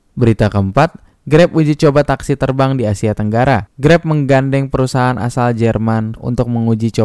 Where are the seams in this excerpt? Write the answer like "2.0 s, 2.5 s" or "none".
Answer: 6.2 s